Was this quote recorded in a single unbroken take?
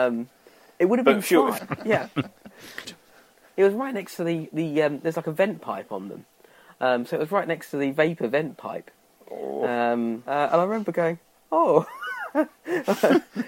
no; 2 cuts; at 1.6 s, 2.8 s

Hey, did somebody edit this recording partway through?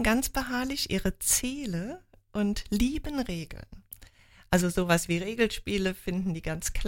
no; 0 cuts

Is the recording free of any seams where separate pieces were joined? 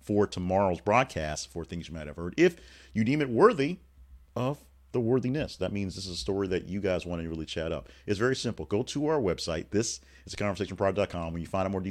yes; 0 cuts

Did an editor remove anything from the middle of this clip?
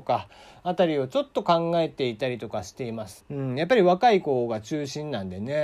yes; 1 cut; at 3.2 s

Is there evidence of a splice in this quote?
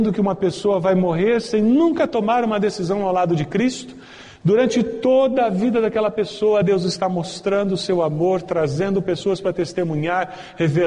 no; 0 cuts

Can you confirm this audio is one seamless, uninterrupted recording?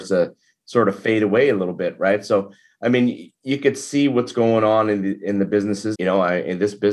no; 1 cut; at 5.9 s

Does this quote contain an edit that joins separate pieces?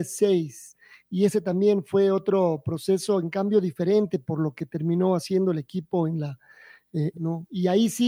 yes; 1 cut; at 7.1 s

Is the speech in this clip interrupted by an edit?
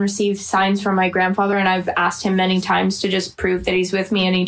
no; 0 cuts

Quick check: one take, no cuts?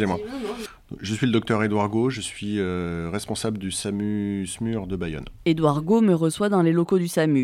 yes; 0 cuts

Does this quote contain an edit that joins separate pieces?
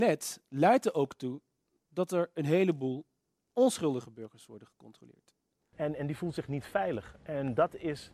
yes; 1 cut; at 5.7 s

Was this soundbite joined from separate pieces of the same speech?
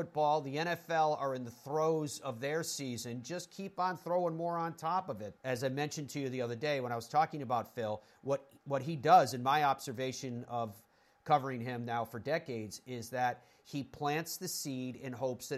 yes; 1 cut; at 5.4 s

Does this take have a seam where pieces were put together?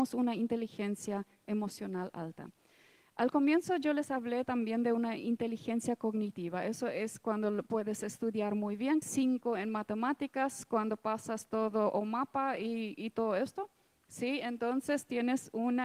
yes; 1 cut; at 9.0 s

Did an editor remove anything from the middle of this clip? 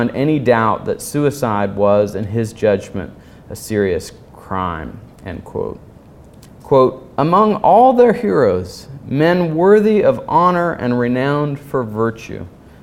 yes; 1 cut; at 6.5 s

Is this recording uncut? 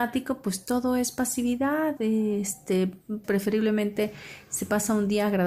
no; 2 cuts; at 2.0 s, 3.2 s

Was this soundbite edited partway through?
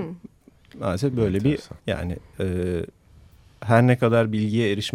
yes; 1 cut; at 1.8 s

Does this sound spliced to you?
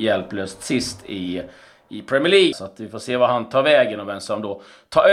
yes; 1 cut; at 2.5 s

